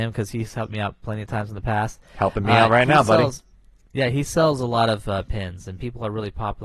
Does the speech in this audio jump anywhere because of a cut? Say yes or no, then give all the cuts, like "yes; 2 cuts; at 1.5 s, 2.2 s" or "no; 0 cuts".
no; 0 cuts